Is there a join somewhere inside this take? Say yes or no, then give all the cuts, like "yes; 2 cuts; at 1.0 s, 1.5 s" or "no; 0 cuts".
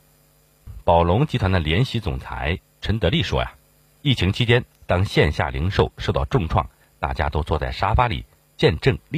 yes; 1 cut; at 4.7 s